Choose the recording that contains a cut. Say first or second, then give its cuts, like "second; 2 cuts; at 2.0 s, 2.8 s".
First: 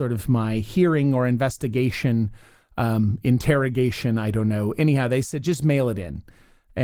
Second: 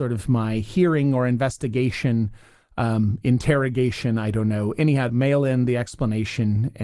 second; 1 cut; at 5.1 s